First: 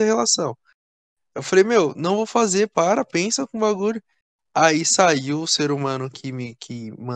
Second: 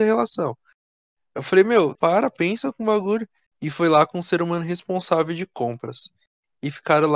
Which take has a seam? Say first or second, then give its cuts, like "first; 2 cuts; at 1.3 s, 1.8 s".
second; 2 cuts; at 2.0 s, 3.5 s